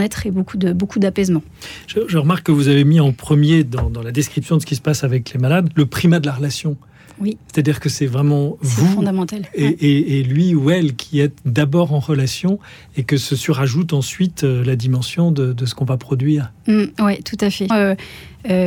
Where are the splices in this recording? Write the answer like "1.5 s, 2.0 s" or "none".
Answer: 17.7 s